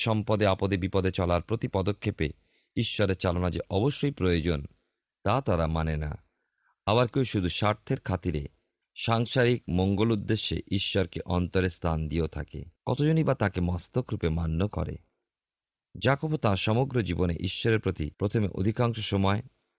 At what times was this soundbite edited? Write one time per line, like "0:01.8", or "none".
0:07.1
0:12.8
0:18.1